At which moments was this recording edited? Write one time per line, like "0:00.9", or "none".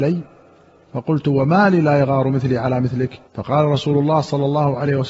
0:03.3